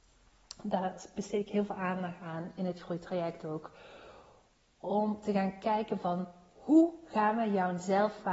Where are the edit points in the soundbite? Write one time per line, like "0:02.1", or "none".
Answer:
none